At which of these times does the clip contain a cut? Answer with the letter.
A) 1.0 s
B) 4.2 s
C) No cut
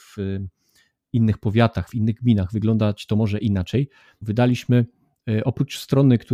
B